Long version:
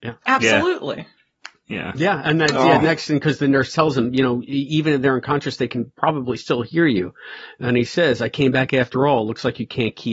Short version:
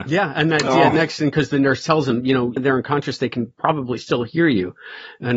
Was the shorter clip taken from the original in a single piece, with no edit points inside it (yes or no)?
no